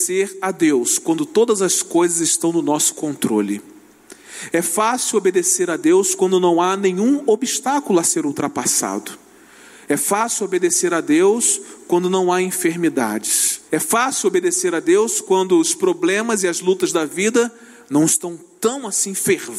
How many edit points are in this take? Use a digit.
1